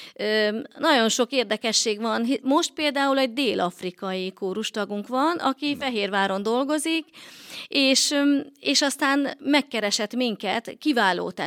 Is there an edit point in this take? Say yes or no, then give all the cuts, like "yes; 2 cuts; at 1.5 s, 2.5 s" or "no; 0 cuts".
no; 0 cuts